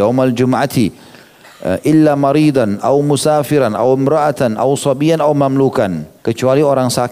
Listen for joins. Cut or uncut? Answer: cut